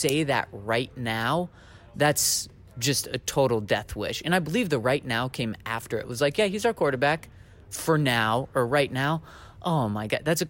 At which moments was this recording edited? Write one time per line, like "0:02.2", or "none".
none